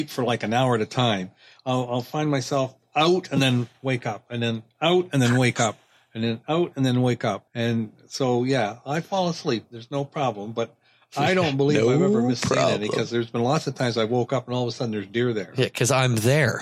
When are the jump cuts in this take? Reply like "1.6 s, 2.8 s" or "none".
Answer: 7.5 s